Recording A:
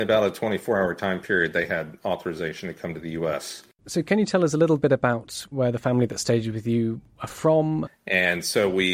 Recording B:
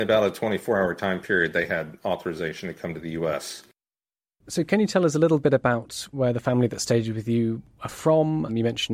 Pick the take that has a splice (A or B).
A